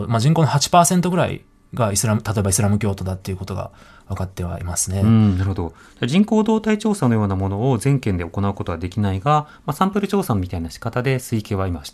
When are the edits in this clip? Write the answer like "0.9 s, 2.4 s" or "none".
none